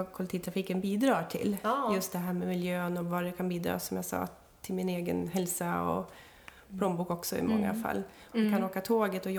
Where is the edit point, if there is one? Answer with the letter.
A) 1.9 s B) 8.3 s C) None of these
B